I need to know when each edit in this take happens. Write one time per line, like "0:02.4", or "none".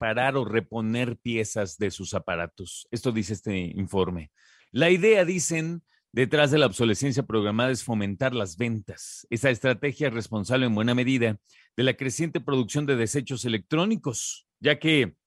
0:04.6